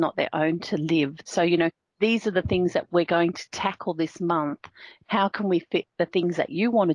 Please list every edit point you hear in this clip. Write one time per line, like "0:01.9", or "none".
0:01.2
0:05.0